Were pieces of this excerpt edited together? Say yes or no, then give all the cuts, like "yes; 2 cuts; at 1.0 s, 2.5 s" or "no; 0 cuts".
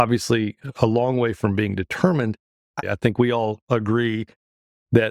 yes; 1 cut; at 2.8 s